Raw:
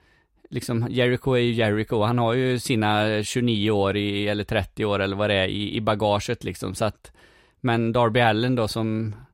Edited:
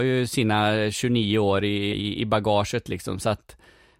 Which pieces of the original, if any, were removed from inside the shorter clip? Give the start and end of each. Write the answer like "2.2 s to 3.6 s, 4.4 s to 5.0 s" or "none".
4.2 s to 5.5 s